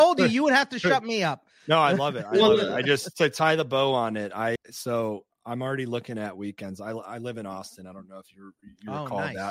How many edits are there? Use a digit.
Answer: 1